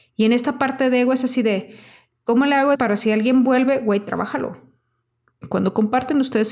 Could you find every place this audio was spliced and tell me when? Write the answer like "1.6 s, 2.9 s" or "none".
2.7 s, 5.4 s